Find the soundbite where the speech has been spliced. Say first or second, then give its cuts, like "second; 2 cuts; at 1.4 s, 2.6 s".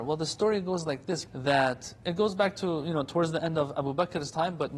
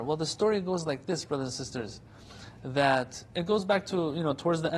first; 1 cut; at 1.3 s